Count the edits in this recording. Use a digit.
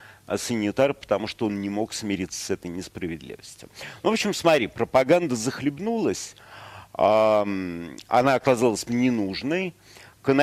1